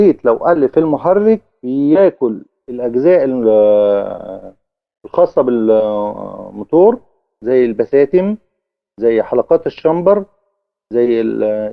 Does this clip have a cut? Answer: no; 0 cuts

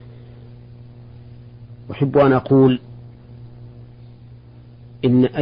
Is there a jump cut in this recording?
no; 0 cuts

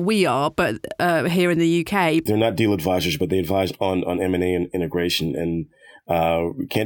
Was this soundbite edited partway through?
yes; 1 cut; at 2.3 s

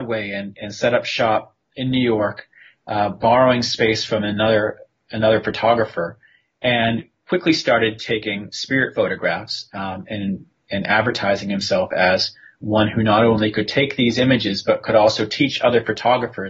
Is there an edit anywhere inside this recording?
no; 0 cuts

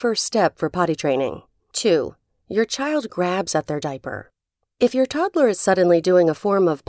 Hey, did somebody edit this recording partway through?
yes; 1 cut; at 1.6 s

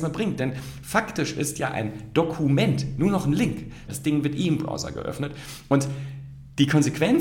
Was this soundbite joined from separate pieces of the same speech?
yes; 1 cut; at 3.9 s

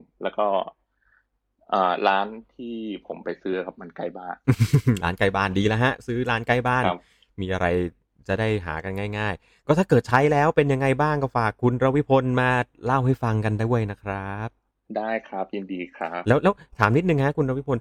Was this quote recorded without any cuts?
yes; 0 cuts

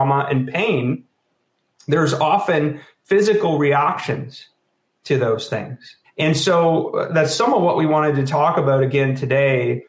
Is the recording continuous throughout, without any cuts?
no; 1 cut; at 6.0 s

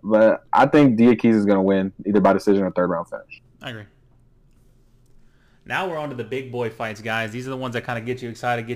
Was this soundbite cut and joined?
no; 0 cuts

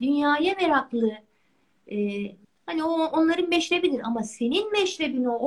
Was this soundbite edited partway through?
yes; 1 cut; at 2.4 s

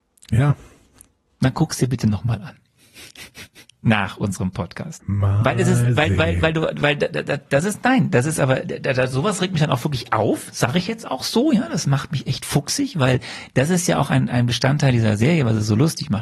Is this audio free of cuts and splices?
no; 1 cut; at 5.0 s

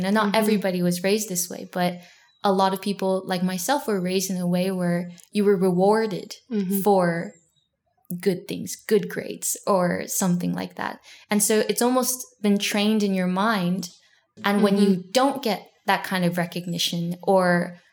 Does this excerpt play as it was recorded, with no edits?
yes; 0 cuts

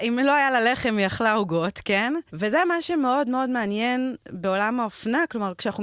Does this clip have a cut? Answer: yes; 1 cut; at 2.3 s

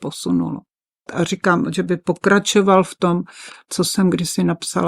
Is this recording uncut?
no; 1 cut; at 1.1 s

